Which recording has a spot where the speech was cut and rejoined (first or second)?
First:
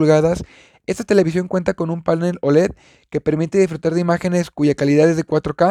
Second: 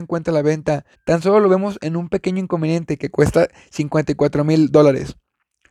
second